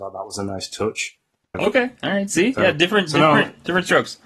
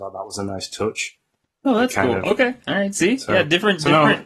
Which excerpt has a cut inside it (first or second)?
first